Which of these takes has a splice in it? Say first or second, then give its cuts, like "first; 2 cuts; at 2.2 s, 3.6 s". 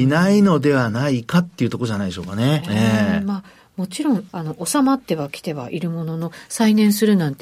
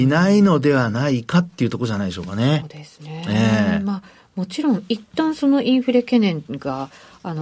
first; 2 cuts; at 2.6 s, 4.3 s